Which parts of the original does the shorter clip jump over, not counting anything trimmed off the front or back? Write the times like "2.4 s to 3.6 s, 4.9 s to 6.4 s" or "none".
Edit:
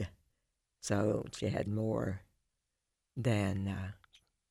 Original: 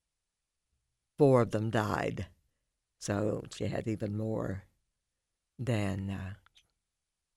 3.8 s to 4.1 s